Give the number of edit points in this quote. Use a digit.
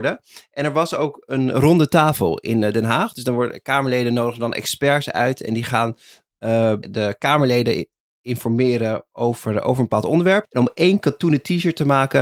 2